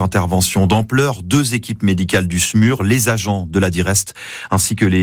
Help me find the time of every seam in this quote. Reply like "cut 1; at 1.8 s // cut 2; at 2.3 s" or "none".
none